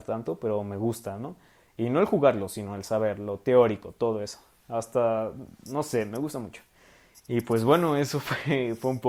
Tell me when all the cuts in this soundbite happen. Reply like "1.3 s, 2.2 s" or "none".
7.1 s